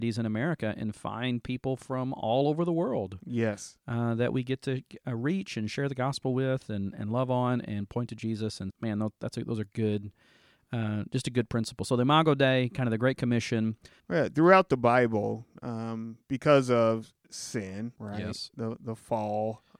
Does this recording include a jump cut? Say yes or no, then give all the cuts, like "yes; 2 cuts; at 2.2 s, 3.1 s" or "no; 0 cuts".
yes; 3 cuts; at 8.7 s, 14.0 s, 18.0 s